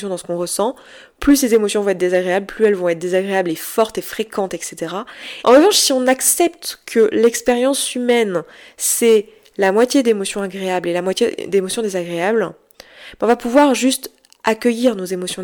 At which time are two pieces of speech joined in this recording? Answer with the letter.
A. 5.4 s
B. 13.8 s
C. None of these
A